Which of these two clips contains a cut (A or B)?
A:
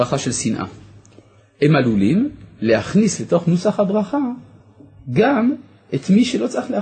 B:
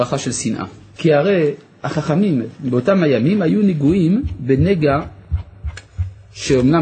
B